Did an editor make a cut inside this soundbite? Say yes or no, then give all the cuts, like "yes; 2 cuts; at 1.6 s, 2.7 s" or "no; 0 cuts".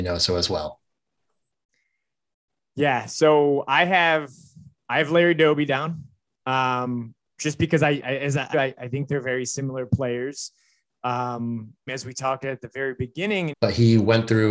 yes; 3 cuts; at 8.5 s, 11.9 s, 13.5 s